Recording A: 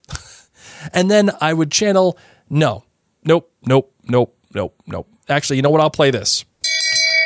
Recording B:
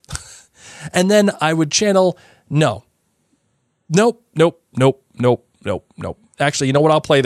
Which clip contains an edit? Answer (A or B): A